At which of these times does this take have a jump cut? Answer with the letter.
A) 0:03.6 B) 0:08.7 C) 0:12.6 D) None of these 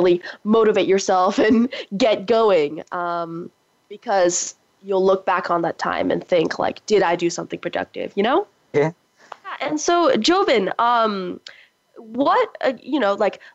B